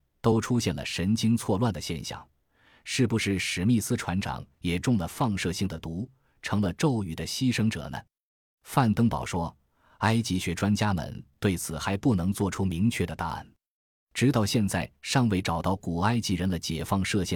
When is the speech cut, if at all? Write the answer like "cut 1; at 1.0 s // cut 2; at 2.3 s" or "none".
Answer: none